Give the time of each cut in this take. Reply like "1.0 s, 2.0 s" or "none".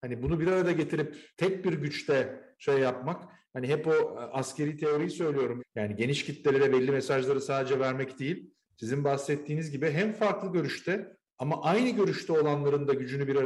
1.3 s, 5.6 s